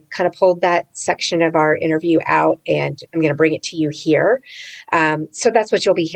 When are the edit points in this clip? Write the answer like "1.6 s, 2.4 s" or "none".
3.1 s